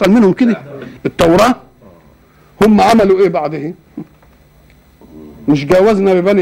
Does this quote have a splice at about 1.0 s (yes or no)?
yes